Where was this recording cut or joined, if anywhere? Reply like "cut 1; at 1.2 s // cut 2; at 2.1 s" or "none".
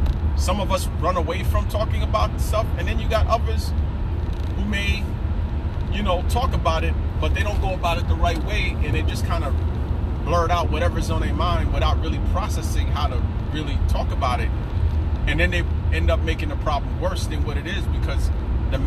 none